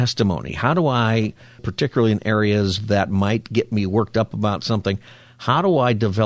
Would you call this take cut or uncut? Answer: cut